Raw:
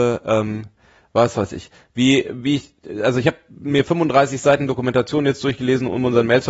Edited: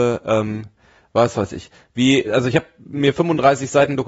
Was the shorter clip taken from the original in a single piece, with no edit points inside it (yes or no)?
no